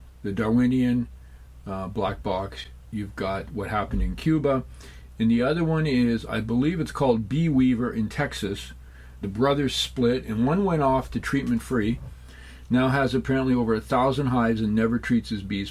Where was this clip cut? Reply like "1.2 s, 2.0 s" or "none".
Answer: 9.2 s

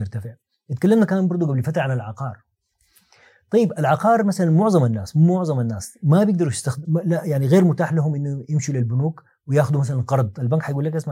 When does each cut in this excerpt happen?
6.8 s

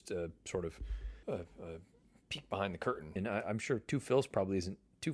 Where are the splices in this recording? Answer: 1.2 s, 3.2 s

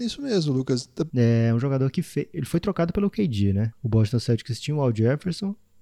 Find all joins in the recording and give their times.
1.1 s, 3.7 s

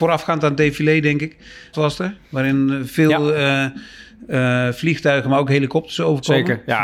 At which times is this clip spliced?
1.7 s

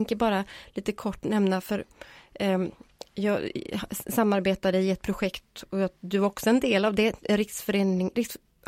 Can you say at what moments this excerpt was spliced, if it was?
none

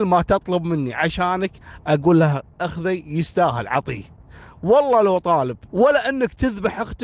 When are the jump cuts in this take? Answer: 5.7 s

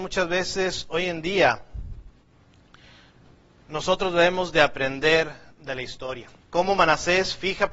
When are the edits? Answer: 6.4 s

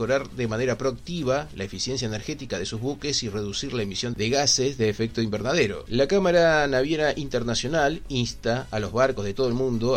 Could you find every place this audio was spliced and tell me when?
5.9 s

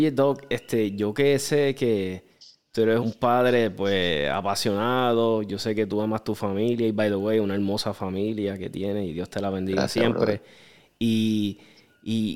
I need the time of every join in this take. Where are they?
3.0 s

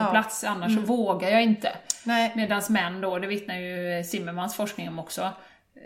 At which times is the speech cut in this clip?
none

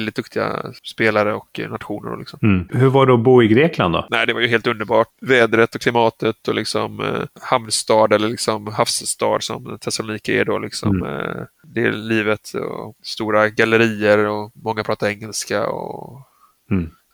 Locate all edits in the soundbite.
none

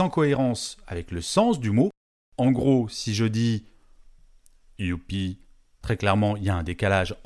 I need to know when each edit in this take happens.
5.8 s

